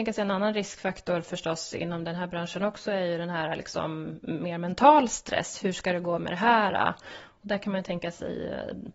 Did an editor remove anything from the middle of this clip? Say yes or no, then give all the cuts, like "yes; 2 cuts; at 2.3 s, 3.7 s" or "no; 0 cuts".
no; 0 cuts